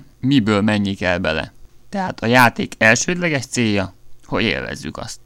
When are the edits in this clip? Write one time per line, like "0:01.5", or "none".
0:01.7